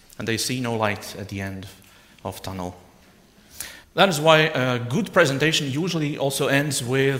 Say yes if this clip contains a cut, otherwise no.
yes